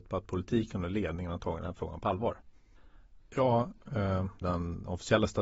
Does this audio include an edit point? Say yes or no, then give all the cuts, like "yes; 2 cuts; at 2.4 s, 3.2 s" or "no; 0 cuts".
yes; 2 cuts; at 3.2 s, 4.4 s